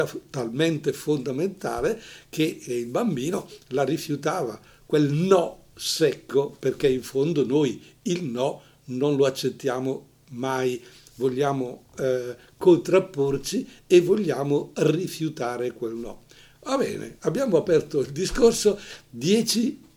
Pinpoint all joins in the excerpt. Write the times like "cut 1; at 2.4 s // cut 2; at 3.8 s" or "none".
cut 1; at 16.5 s